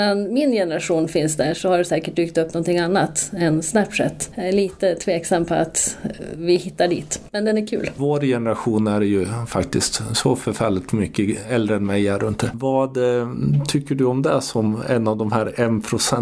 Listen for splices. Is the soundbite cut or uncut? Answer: cut